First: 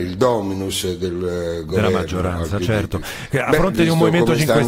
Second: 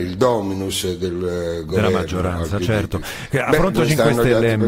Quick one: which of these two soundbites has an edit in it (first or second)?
second